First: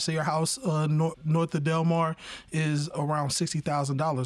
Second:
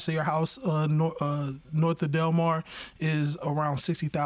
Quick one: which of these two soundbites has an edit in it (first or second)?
first